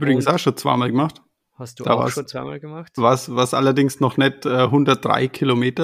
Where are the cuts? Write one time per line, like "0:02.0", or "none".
none